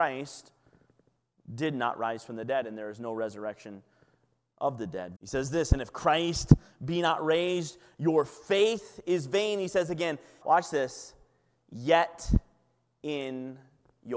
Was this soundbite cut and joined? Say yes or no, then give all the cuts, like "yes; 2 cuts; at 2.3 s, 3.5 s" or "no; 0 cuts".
yes; 2 cuts; at 5.1 s, 10.4 s